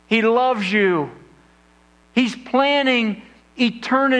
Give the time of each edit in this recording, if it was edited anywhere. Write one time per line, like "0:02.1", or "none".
0:02.0